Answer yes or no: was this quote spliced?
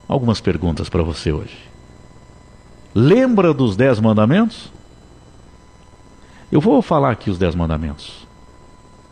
no